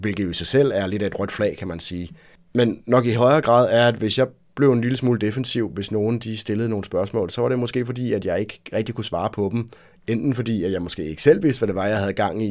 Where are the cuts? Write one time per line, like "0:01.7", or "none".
none